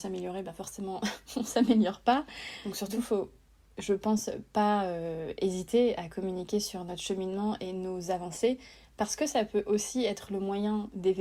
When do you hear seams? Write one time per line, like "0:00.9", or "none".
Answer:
none

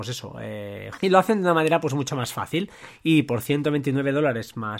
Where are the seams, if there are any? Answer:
0:01.0

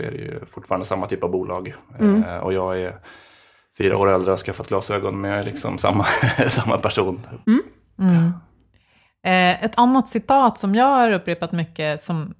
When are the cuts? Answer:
0:07.4

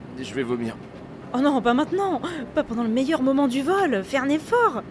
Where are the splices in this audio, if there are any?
none

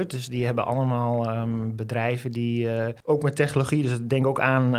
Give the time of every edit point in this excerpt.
0:03.0

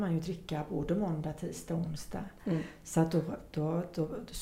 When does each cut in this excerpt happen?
none

